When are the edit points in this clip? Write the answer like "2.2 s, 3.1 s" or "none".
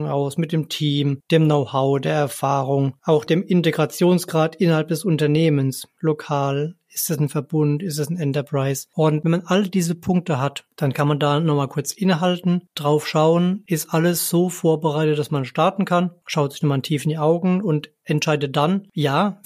none